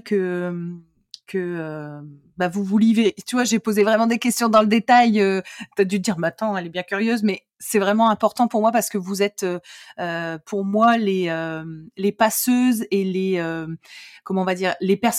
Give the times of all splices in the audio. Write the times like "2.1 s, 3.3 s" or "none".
none